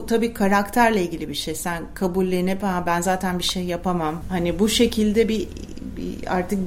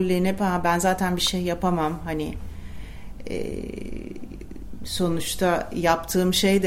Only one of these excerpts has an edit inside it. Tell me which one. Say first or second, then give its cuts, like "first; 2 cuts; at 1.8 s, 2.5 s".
first; 1 cut; at 4.2 s